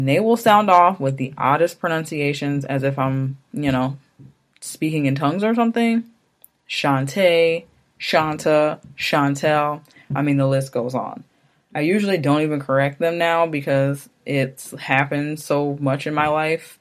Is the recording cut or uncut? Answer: uncut